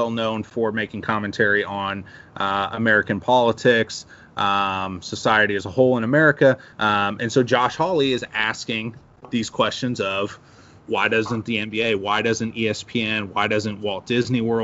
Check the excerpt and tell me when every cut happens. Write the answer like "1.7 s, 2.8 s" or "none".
6.7 s